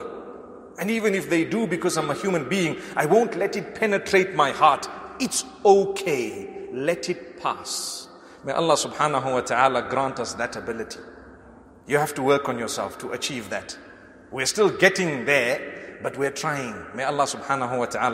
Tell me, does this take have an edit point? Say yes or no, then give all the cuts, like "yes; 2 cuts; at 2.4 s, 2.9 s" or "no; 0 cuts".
no; 0 cuts